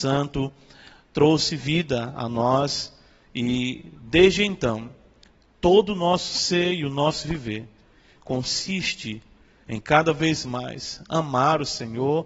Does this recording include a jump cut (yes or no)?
no